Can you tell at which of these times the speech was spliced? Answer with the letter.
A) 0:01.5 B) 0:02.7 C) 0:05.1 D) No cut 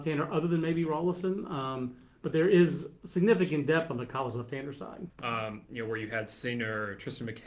C